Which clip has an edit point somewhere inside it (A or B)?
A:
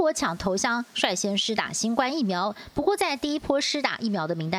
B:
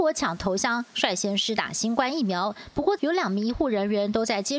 B